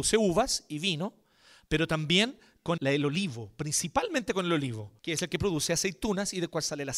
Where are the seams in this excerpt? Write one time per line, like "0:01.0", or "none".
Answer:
0:02.8
0:05.0